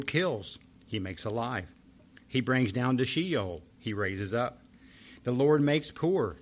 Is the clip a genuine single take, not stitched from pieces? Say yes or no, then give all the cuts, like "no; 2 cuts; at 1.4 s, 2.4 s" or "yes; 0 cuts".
yes; 0 cuts